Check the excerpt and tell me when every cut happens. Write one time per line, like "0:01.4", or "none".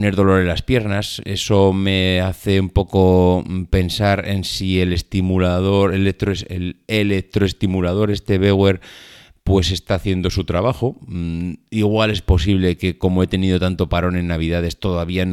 none